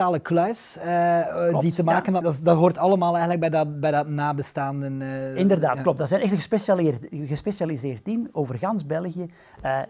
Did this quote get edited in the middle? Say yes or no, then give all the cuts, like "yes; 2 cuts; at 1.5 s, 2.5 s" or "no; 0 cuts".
yes; 1 cut; at 2.2 s